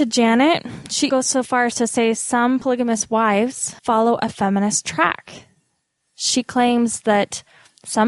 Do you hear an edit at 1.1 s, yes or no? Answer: yes